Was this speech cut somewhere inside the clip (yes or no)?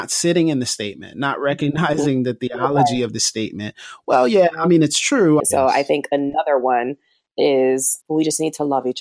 yes